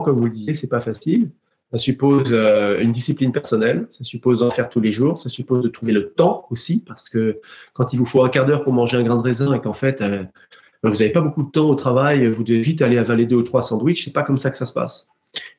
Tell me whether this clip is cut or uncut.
uncut